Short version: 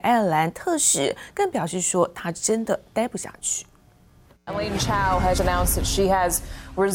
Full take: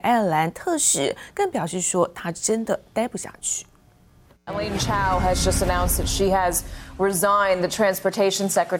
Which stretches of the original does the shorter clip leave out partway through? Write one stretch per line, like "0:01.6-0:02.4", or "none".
0:05.4-0:05.6